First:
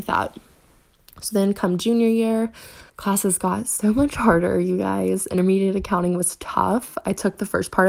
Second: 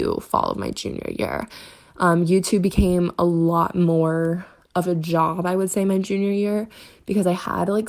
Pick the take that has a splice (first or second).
first